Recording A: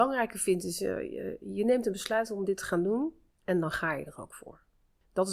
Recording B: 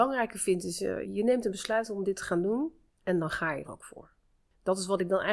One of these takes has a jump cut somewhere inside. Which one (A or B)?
B